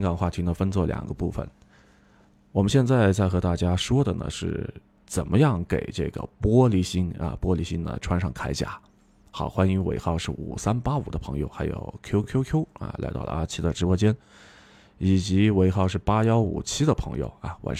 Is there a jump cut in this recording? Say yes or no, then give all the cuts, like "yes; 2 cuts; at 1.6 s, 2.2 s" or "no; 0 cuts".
no; 0 cuts